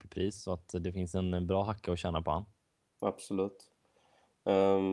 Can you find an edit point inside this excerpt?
no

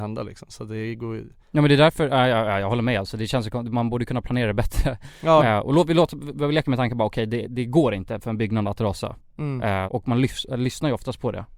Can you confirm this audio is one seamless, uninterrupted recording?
no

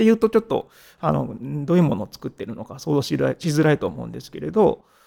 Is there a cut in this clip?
no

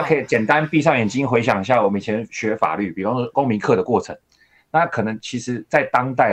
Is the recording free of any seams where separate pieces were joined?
yes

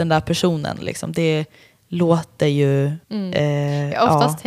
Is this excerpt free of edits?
no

